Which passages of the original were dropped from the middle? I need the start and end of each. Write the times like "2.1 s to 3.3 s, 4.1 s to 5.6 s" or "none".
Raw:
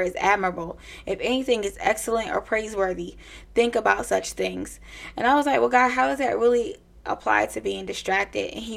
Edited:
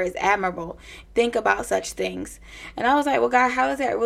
1.0 s to 3.4 s